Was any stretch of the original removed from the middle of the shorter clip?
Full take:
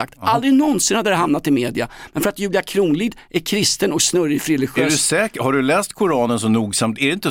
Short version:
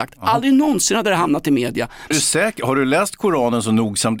yes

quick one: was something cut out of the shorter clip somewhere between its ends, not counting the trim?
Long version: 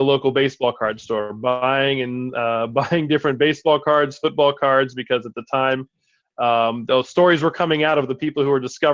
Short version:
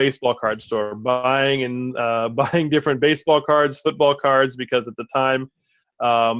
no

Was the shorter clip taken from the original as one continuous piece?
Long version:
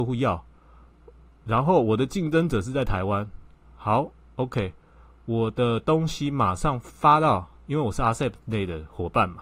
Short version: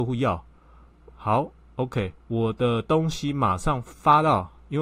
no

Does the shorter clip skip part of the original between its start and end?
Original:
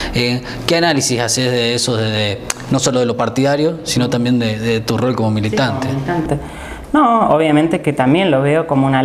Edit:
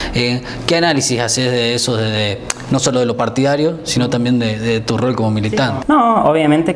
yes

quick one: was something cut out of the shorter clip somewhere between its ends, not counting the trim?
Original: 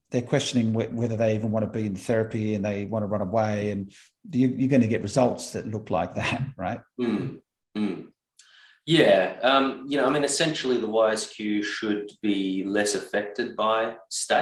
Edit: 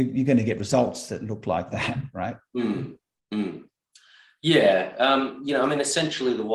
no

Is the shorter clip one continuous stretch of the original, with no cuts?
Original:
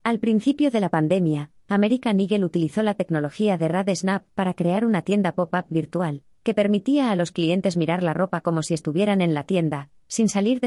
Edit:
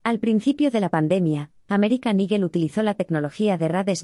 yes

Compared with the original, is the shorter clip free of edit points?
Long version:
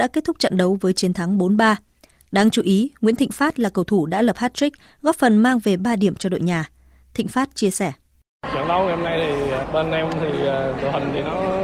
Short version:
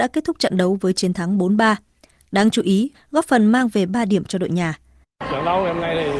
no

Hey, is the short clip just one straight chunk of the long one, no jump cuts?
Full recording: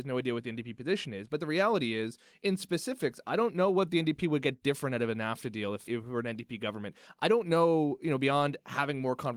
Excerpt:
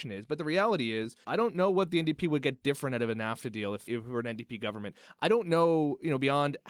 no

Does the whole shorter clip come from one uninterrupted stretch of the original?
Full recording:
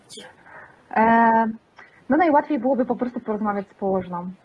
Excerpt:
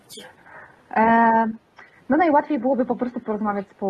yes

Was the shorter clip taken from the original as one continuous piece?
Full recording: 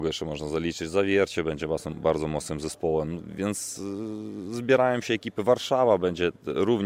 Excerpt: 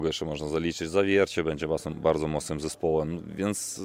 yes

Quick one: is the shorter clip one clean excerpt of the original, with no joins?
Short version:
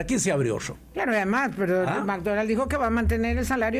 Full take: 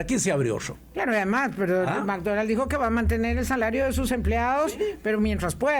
yes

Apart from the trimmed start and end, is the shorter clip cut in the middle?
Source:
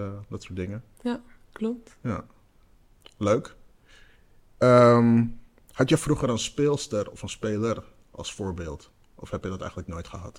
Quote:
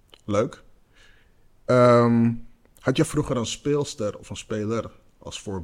no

